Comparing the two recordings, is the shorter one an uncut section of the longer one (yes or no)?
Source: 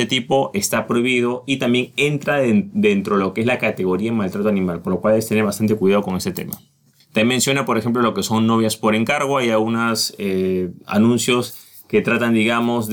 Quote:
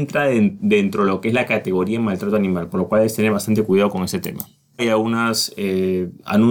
no